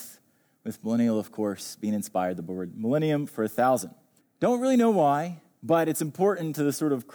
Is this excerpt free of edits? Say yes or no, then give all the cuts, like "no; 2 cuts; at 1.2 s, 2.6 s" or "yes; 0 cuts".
no; 1 cut; at 4.2 s